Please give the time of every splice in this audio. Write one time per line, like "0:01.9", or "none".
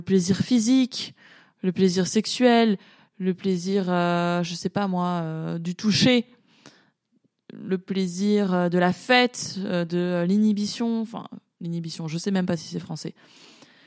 none